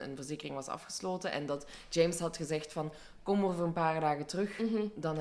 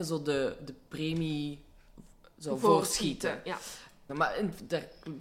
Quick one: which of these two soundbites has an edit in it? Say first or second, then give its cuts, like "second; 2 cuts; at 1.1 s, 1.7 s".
second; 1 cut; at 4.1 s